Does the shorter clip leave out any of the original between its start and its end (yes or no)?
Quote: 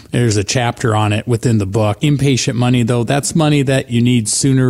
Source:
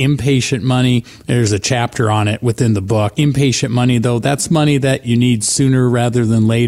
no